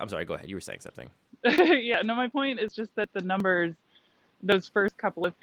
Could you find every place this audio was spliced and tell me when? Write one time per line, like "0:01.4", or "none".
none